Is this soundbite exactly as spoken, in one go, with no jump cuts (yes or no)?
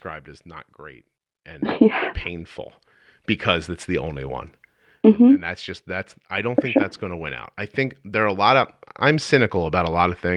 yes